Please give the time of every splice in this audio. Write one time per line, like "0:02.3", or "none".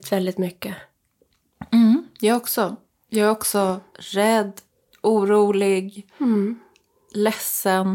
none